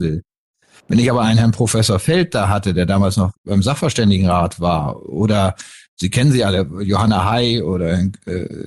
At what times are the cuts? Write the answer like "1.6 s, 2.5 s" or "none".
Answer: none